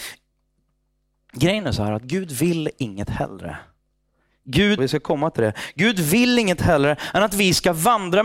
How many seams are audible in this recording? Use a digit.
1